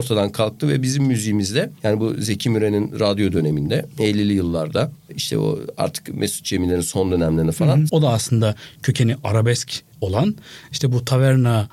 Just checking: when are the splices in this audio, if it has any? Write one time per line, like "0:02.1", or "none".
0:07.9
0:09.9